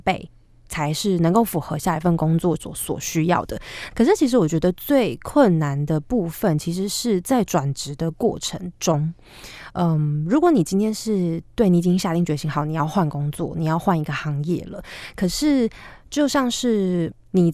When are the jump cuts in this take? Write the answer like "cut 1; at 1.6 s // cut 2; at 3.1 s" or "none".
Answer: cut 1; at 3.9 s